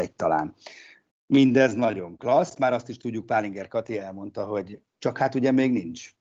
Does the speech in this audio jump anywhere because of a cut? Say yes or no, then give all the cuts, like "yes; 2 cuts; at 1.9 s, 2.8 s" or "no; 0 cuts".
yes; 2 cuts; at 1.1 s, 4.8 s